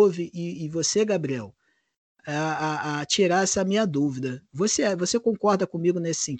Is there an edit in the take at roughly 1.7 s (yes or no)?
no